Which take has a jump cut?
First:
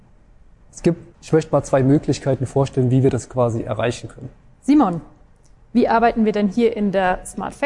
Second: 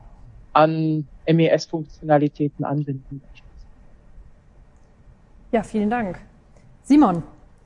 first; 2 cuts; at 1.1 s, 4.5 s

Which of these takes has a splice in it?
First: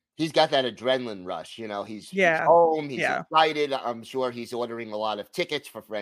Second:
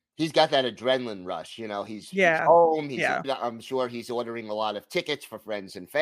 second; 1 cut; at 3.2 s

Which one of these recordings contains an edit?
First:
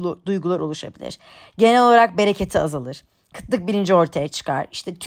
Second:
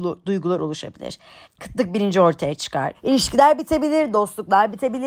second; 2 cuts; at 1.4 s, 2.9 s

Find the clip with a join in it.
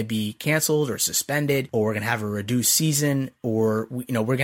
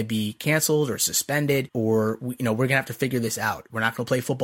second; 1 cut; at 1.7 s

